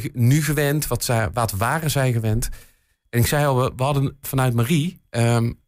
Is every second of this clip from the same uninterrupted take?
no; 1 cut; at 4.2 s

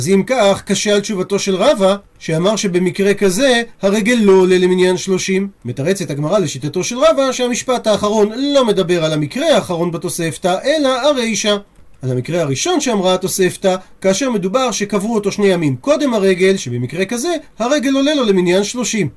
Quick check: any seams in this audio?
no; 0 cuts

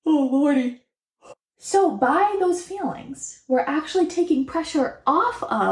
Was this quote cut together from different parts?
yes; 1 cut; at 1.5 s

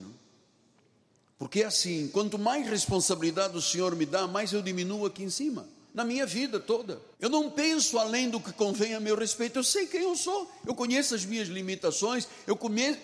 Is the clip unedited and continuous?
no; 1 cut; at 7.1 s

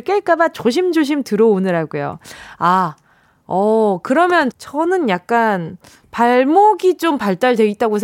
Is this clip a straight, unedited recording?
no; 2 cuts; at 4.5 s, 6.0 s

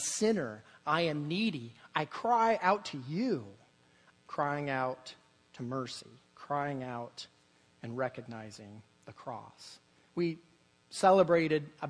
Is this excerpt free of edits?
no; 2 cuts; at 4.1 s, 10.1 s

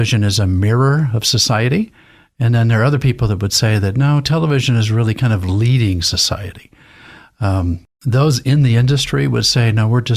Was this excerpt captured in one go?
yes; 0 cuts

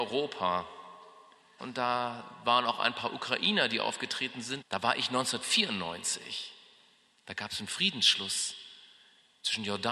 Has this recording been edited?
yes; 2 cuts; at 1.6 s, 4.6 s

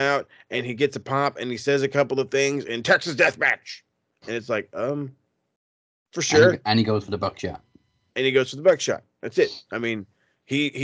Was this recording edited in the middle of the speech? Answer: no; 0 cuts

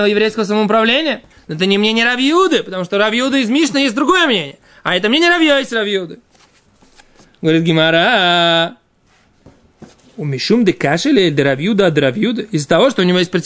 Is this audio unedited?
no; 1 cut; at 1.3 s

